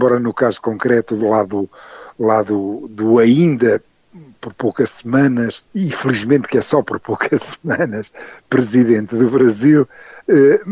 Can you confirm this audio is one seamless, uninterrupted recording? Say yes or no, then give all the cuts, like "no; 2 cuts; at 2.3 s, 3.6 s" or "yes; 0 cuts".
no; 1 cut; at 5.6 s